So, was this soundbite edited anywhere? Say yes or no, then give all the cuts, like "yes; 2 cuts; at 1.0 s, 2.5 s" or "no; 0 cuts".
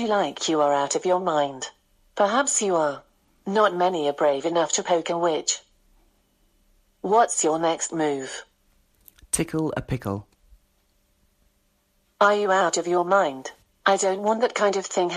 yes; 2 cuts; at 12.0 s, 13.7 s